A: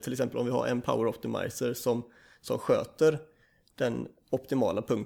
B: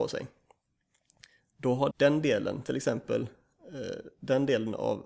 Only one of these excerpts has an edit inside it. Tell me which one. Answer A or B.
B